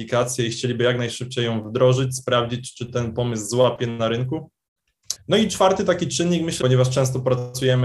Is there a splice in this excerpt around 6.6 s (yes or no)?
yes